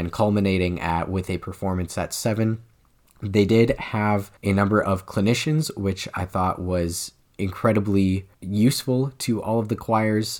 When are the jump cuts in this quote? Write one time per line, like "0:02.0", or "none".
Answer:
0:04.4
0:08.3